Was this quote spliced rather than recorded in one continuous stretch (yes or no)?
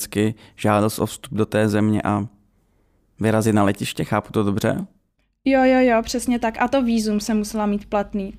no